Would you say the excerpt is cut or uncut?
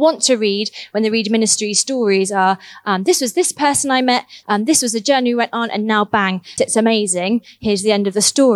cut